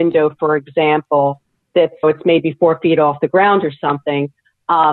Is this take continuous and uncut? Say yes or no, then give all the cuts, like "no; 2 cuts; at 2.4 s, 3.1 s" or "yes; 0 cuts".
no; 1 cut; at 2.0 s